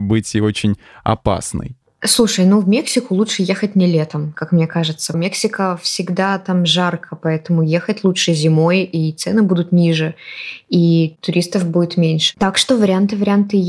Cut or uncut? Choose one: cut